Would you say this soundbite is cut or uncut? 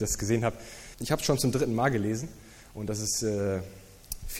cut